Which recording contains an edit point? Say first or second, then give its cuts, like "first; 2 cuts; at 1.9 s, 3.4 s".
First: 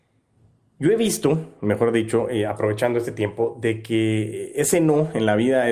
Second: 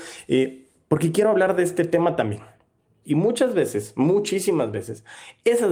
second; 1 cut; at 3.0 s